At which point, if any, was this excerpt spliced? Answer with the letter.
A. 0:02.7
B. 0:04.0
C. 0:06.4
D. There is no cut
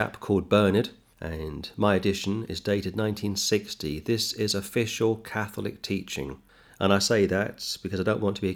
D